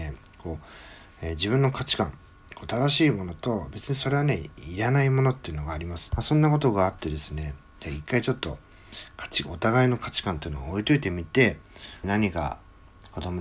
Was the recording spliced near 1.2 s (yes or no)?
no